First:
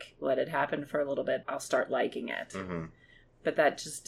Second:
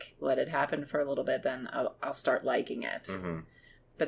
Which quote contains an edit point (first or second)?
first